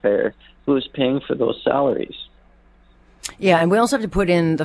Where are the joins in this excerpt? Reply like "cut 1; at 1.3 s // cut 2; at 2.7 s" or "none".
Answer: none